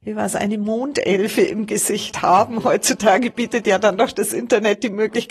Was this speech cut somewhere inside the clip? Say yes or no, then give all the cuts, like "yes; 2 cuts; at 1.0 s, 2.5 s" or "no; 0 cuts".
no; 0 cuts